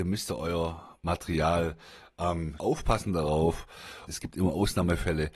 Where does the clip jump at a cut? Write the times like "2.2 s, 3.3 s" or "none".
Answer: 2.6 s, 4.1 s